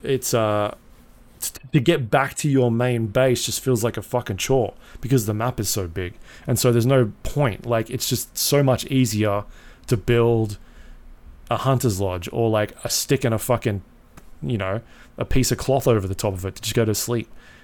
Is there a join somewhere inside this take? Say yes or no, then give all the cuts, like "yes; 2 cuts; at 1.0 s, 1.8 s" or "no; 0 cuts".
no; 0 cuts